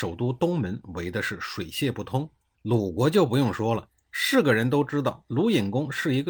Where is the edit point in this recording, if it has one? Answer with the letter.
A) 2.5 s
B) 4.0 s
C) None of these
A